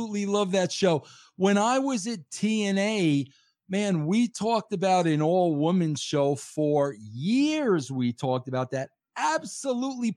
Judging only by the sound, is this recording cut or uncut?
uncut